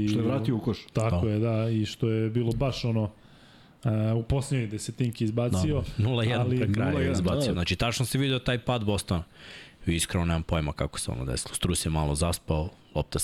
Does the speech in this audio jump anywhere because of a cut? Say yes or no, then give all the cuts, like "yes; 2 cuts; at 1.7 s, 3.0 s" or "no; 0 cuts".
yes; 1 cut; at 7.5 s